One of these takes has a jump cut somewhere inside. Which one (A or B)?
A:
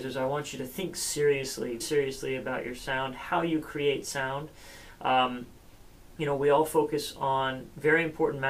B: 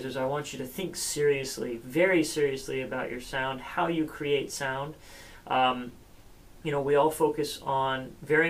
A